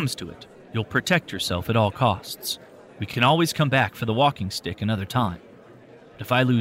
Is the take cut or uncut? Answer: uncut